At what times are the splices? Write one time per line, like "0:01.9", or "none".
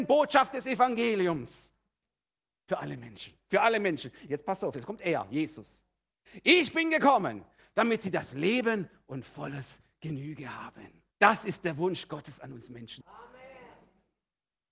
0:04.3
0:11.1
0:13.0